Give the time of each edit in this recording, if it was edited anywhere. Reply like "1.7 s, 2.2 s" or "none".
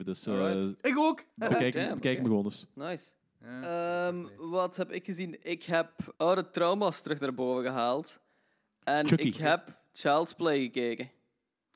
6.1 s